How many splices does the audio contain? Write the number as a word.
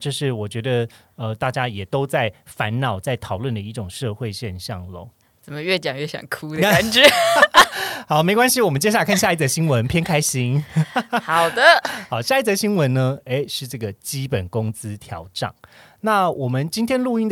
one